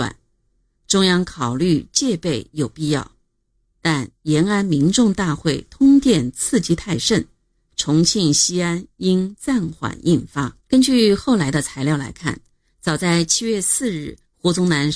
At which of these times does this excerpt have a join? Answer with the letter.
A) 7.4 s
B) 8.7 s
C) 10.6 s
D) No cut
C